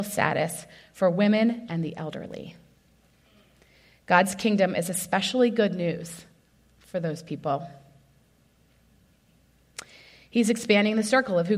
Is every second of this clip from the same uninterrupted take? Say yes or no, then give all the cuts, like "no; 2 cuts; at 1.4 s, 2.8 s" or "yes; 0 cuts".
no; 1 cut; at 1.7 s